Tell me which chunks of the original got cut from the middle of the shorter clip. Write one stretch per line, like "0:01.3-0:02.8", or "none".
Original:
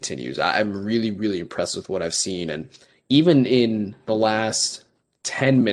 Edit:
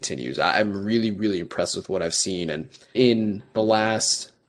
0:02.9-0:03.5